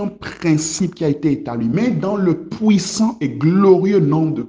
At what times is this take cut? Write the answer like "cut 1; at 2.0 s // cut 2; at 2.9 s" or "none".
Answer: none